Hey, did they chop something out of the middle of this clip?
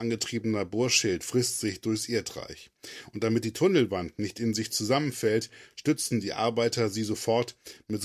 no; 0 cuts

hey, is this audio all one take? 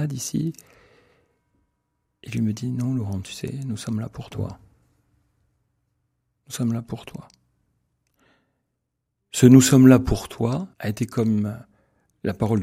no; 1 cut; at 10.7 s

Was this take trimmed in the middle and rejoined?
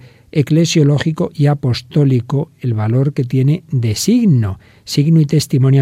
no; 0 cuts

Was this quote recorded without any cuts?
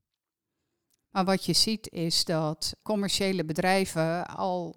no; 2 cuts; at 1.0 s, 2.8 s

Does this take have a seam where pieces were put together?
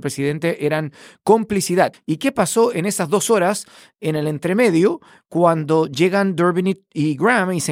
yes; 1 cut; at 1.9 s

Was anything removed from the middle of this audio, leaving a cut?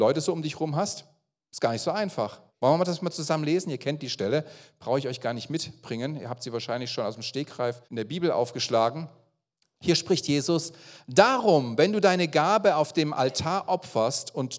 yes; 2 cuts; at 2.5 s, 7.8 s

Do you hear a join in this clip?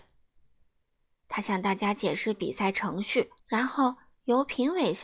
yes; 2 cuts; at 1.2 s, 3.4 s

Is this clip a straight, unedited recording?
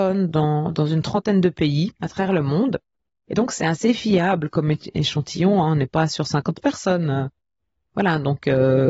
yes; 0 cuts

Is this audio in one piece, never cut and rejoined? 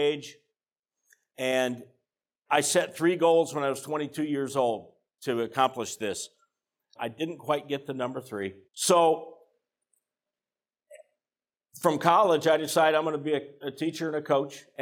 no; 2 cuts; at 7.0 s, 8.7 s

